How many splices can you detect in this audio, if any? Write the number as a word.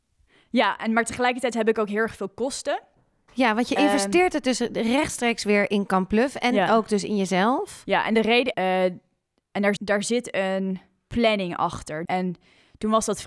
three